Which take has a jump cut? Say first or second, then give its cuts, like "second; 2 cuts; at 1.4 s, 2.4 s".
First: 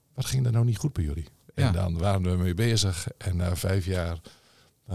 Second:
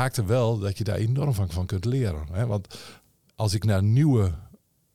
first; 1 cut; at 1.4 s